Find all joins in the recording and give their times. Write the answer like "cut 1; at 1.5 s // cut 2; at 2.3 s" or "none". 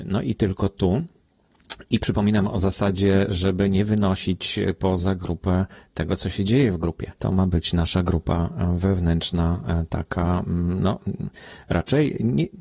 cut 1; at 7.2 s